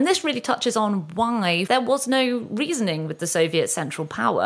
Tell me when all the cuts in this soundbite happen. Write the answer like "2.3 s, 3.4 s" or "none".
1.7 s